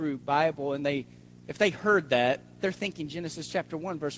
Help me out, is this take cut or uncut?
uncut